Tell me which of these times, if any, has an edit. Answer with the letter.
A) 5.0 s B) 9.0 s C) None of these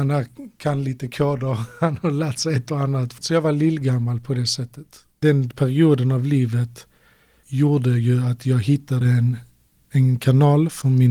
C